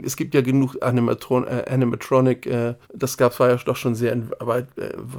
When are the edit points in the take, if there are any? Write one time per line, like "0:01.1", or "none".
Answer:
0:02.8